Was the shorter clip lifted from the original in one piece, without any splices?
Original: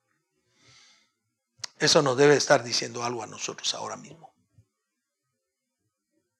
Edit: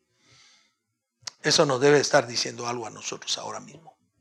yes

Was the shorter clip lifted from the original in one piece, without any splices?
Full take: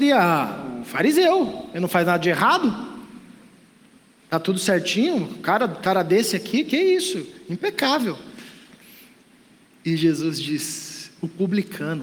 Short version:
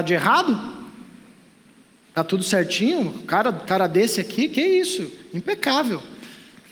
yes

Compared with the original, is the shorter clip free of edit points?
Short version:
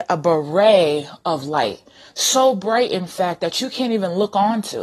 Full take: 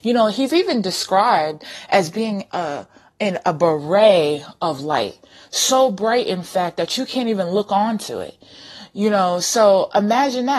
yes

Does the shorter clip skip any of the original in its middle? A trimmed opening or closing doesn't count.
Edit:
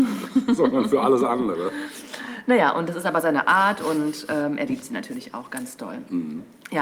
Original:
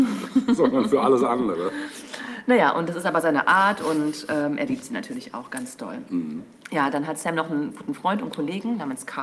no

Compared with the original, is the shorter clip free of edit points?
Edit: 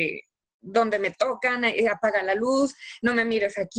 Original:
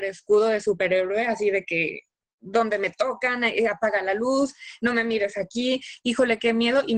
yes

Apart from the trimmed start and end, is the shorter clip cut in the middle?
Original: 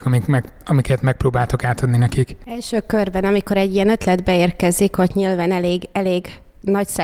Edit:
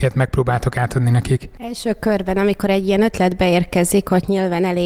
no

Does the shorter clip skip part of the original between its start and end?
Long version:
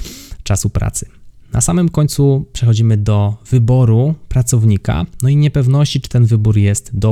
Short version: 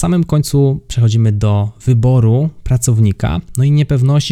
no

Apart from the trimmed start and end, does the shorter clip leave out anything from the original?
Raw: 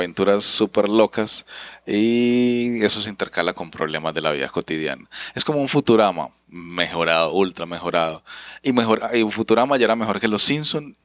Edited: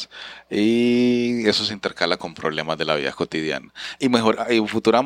yes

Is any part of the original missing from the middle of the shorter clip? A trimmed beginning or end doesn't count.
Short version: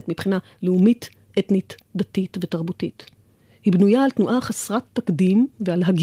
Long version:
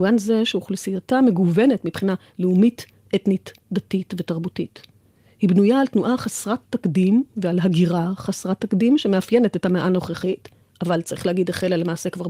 no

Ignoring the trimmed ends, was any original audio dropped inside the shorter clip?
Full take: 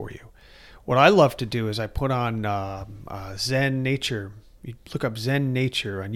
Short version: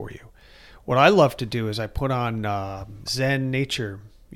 yes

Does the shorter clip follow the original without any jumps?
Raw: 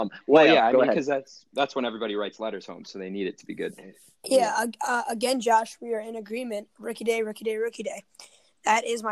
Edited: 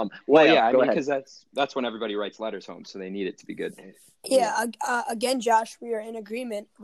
yes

